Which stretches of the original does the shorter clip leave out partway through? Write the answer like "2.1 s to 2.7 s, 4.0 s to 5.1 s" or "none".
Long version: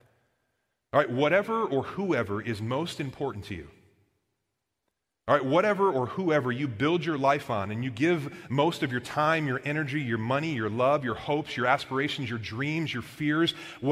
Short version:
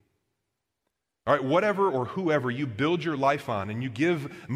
none